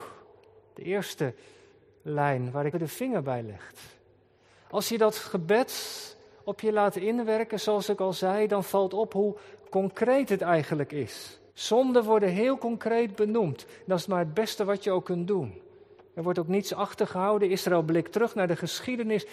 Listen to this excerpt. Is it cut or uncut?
cut